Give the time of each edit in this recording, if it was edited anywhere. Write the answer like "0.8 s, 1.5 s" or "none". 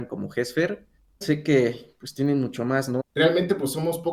1.2 s, 3.0 s